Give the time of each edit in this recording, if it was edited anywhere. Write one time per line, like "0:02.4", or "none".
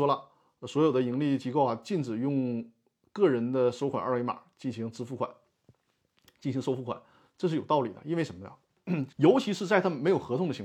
0:09.1